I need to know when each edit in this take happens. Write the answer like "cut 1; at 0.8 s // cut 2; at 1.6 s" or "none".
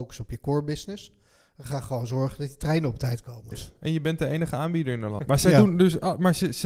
cut 1; at 3.5 s // cut 2; at 5.2 s